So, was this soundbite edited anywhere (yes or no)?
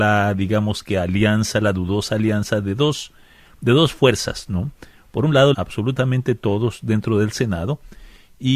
yes